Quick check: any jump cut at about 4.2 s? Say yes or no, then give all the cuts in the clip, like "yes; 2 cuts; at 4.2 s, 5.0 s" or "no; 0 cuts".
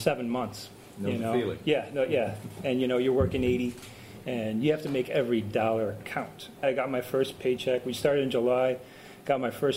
yes; 2 cuts; at 4.2 s, 6.6 s